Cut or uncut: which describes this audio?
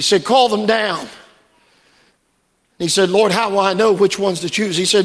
uncut